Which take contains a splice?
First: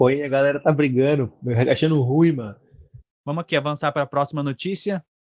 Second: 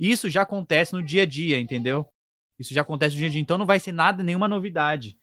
first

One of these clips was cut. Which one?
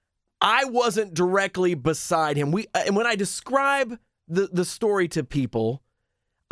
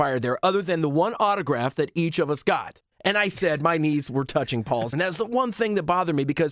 second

